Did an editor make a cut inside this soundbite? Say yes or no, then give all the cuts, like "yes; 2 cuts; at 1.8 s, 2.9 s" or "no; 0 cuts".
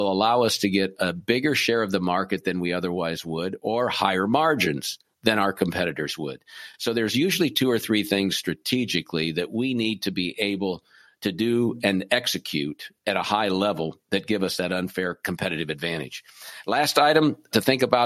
no; 0 cuts